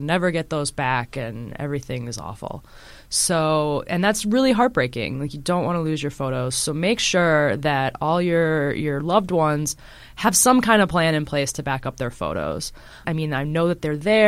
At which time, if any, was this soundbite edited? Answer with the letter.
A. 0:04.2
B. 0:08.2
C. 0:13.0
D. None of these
C